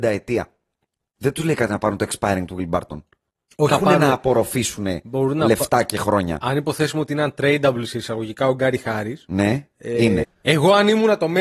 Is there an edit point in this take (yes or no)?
yes